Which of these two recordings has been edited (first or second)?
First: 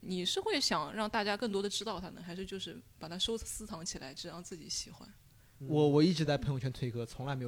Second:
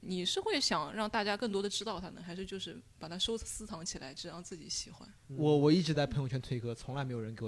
second